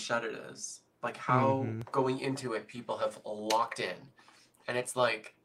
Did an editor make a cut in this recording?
no; 0 cuts

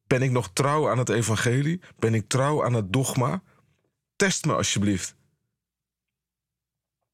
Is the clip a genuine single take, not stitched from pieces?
yes; 0 cuts

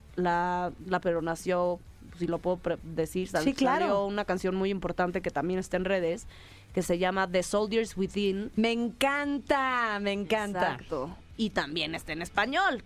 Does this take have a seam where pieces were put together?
yes; 1 cut; at 1.0 s

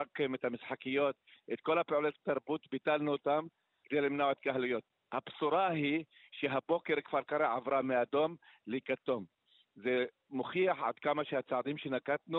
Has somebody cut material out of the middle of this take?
no; 0 cuts

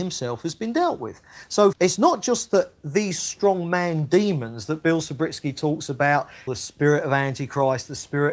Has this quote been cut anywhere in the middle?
yes; 2 cuts; at 1.7 s, 6.5 s

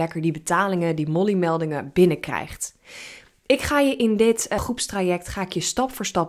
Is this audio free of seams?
no; 1 cut; at 4.6 s

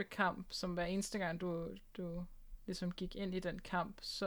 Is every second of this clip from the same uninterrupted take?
yes; 0 cuts

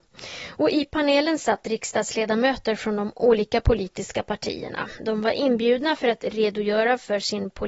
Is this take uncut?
yes; 0 cuts

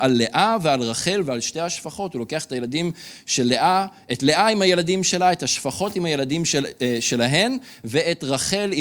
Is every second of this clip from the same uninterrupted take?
yes; 0 cuts

